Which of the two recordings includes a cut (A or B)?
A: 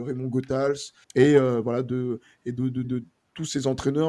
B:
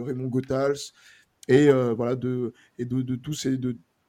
A